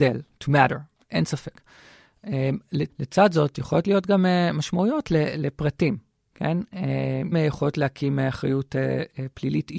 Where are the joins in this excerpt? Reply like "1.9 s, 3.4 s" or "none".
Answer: 2.9 s, 7.3 s